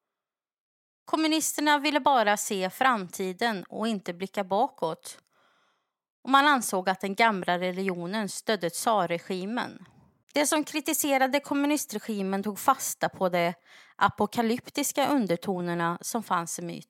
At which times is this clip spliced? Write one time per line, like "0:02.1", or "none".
0:10.2